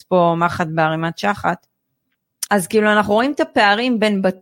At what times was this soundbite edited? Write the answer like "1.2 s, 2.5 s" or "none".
2.5 s